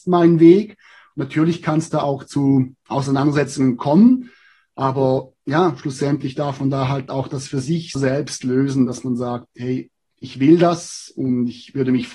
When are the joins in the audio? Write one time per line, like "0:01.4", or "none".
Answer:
0:08.0